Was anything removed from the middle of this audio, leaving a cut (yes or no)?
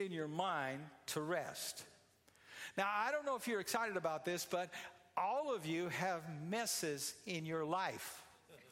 no